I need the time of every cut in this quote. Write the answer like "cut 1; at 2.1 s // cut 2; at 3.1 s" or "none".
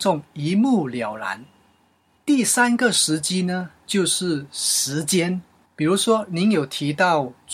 none